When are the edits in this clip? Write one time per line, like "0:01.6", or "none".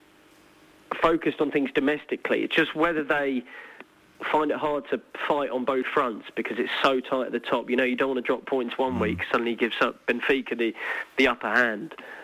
none